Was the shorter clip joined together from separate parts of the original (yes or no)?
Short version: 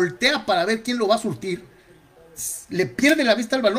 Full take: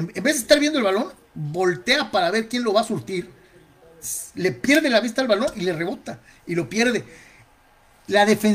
no